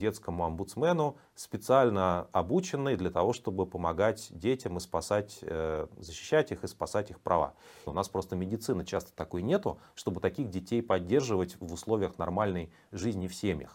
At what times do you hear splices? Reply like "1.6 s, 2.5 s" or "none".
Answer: 7.9 s